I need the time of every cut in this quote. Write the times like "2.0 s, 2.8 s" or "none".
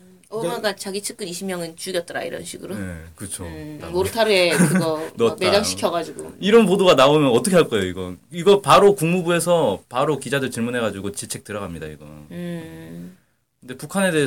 3.8 s